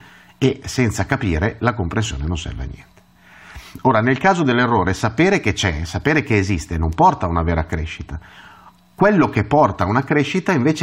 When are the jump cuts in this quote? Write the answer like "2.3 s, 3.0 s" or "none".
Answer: none